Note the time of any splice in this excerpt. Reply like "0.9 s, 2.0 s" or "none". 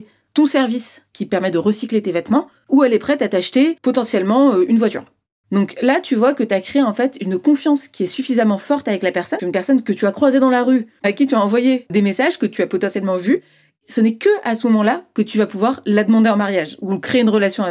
9.4 s